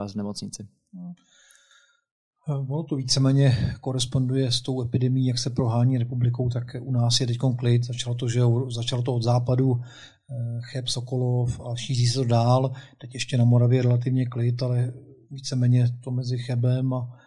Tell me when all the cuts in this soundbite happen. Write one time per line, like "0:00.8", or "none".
none